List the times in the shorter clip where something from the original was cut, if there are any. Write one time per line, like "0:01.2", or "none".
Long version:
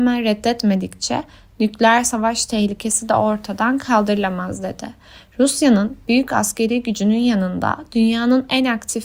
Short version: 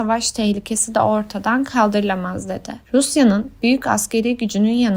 0:02.8